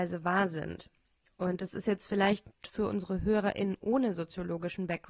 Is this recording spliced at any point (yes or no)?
no